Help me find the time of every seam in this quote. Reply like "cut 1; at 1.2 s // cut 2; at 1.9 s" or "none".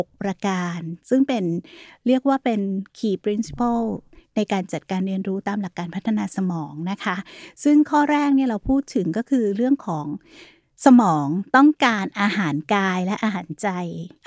none

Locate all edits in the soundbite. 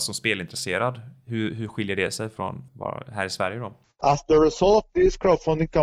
cut 1; at 2.7 s // cut 2; at 3.8 s

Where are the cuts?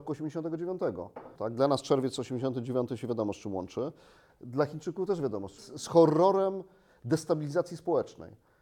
cut 1; at 1.4 s // cut 2; at 5.6 s

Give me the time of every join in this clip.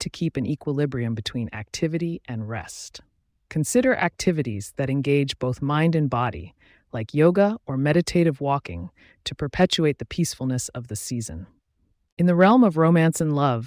none

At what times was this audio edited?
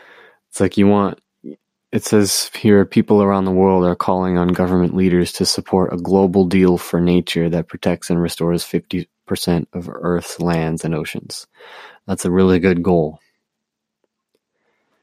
none

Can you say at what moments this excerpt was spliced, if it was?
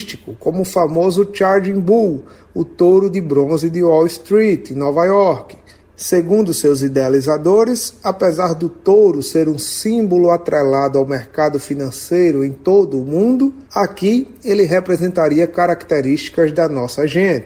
cut 1; at 5.8 s // cut 2; at 13.7 s

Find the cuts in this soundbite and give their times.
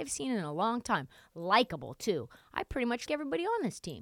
cut 1; at 3.1 s

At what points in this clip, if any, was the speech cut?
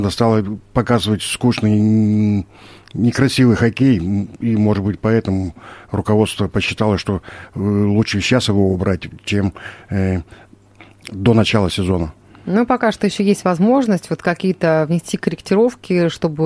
none

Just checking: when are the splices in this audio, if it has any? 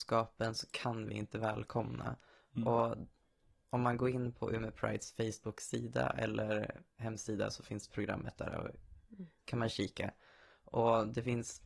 none

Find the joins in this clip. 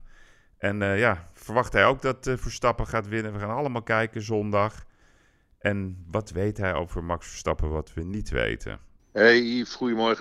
cut 1; at 9.0 s

